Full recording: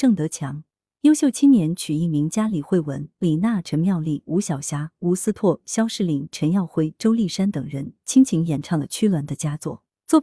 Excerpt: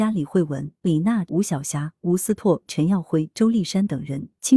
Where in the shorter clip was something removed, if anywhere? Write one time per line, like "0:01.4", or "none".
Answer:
0:01.3
0:02.7